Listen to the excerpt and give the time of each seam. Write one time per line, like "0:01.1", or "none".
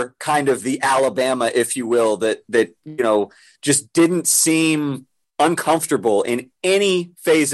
none